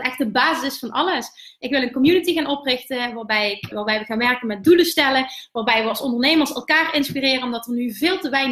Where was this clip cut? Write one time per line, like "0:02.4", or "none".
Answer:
0:03.7

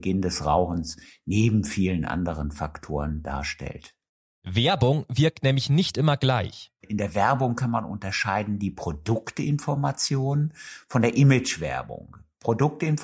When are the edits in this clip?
0:04.2

